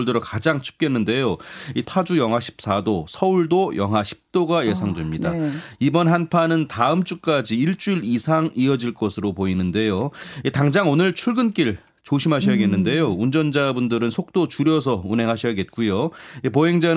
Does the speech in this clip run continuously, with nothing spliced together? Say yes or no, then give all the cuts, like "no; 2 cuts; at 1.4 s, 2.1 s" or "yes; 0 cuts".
no; 1 cut; at 1.8 s